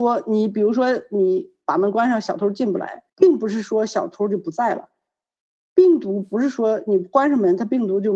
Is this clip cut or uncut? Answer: cut